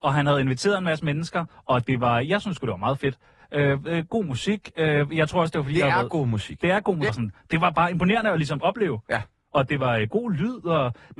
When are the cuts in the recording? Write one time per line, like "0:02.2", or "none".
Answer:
0:07.1